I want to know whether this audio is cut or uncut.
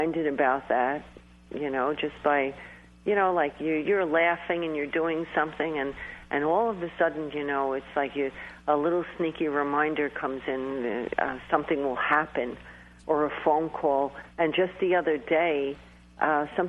cut